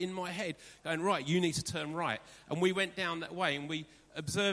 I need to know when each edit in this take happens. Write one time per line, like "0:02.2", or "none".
none